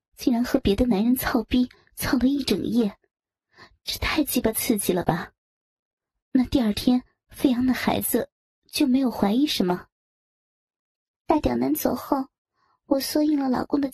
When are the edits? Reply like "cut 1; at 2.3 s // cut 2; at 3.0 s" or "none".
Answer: cut 1; at 11.2 s

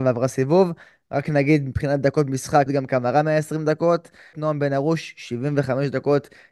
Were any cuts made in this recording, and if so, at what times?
cut 1; at 2.7 s // cut 2; at 4.3 s

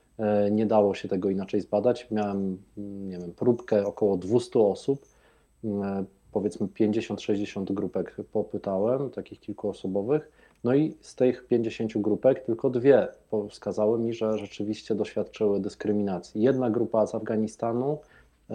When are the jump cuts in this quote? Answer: none

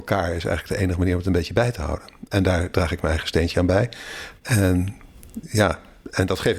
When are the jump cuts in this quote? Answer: cut 1; at 4.4 s

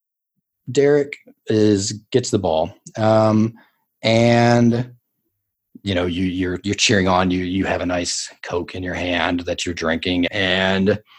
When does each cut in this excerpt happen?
cut 1; at 10.3 s

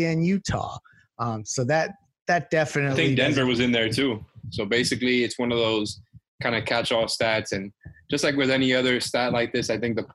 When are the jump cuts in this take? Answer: cut 1; at 4.4 s

